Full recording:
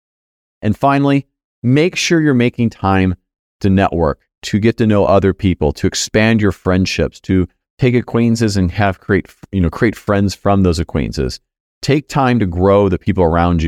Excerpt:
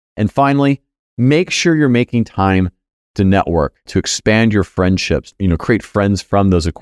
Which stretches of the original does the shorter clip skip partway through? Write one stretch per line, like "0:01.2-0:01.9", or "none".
0:04.3-0:05.7
0:07.2-0:09.4